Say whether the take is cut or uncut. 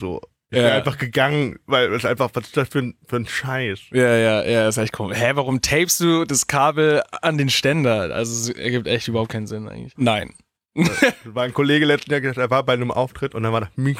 cut